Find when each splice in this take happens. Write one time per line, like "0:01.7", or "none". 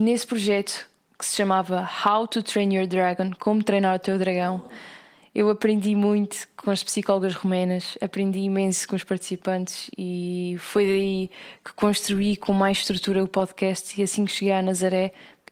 none